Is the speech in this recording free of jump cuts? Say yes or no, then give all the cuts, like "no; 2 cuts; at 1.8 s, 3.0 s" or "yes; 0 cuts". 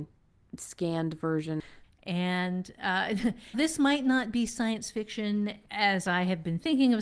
no; 3 cuts; at 1.8 s, 3.5 s, 5.6 s